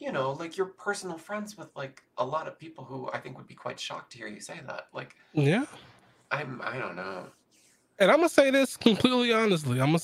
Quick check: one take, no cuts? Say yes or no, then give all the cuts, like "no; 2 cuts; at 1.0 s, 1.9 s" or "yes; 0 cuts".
yes; 0 cuts